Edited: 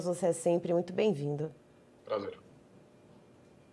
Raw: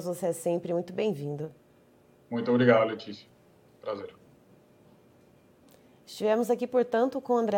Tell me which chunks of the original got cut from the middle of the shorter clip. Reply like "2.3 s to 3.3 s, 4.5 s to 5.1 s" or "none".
2.0 s to 3.7 s